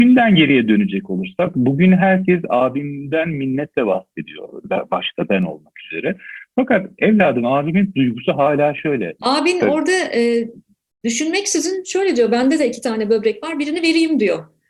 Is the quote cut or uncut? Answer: cut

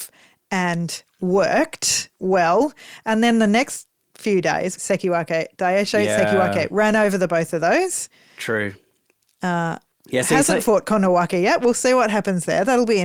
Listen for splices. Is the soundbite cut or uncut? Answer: cut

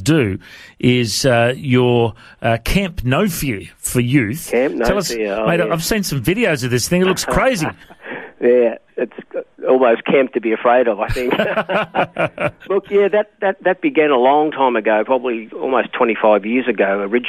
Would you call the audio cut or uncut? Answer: uncut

